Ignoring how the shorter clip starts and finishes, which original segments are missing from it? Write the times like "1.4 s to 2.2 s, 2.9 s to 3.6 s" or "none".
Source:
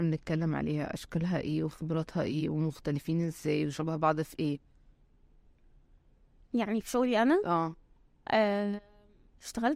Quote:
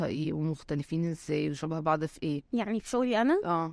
4.6 s to 6.5 s